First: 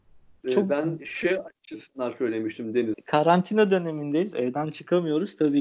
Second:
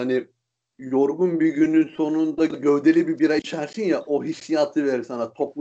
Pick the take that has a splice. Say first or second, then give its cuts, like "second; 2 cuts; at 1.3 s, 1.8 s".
first; 1 cut; at 2.9 s